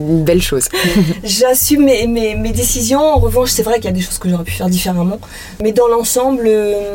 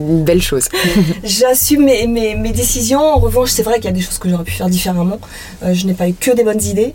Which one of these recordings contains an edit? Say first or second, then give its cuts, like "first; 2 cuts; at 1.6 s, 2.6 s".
first; 1 cut; at 5.6 s